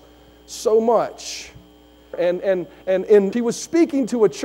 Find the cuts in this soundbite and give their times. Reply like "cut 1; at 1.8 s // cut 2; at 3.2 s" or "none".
cut 1; at 2.1 s // cut 2; at 3.3 s